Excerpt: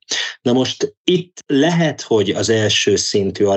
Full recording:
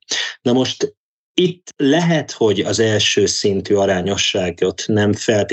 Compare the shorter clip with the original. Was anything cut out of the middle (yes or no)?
yes